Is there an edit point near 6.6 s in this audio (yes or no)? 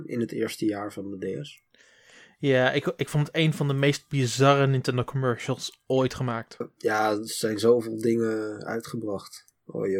yes